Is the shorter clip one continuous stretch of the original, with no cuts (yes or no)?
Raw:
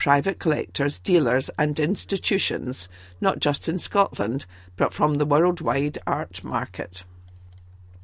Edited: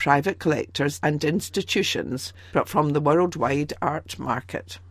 no